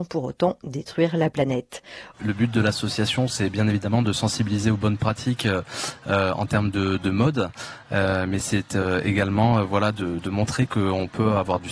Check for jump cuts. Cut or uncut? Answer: cut